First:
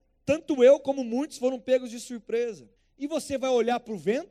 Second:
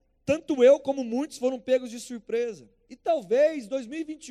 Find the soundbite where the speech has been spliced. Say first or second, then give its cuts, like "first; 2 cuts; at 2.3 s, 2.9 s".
first; 1 cut; at 2.8 s